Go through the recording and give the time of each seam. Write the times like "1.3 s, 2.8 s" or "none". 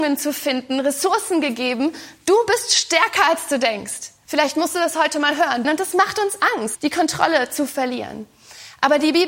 4.3 s, 5.6 s, 6.7 s